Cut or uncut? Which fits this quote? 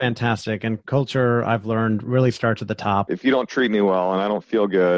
cut